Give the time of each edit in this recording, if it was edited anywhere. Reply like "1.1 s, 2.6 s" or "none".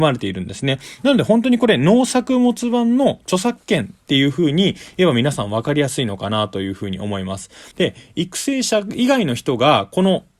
7.7 s

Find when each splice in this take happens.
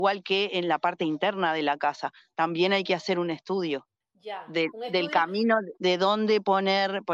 5.8 s

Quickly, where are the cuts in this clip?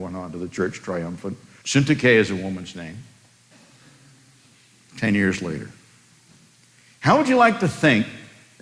1.6 s, 3.5 s

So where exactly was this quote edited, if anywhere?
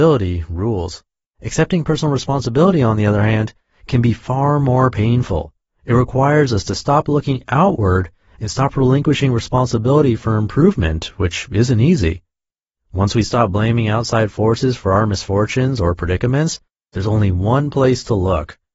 1.3 s

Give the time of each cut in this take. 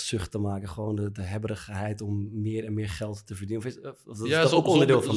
none

